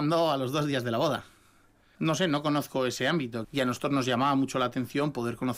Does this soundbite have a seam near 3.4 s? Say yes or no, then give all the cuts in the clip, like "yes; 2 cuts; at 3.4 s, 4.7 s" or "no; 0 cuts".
yes; 2 cuts; at 2.0 s, 3.4 s